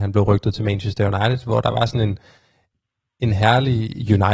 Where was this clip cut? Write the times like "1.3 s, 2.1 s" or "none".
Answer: none